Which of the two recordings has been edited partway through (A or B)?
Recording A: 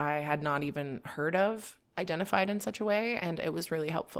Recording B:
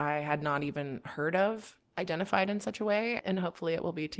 B